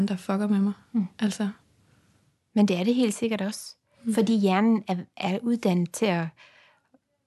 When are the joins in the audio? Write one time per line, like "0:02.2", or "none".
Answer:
none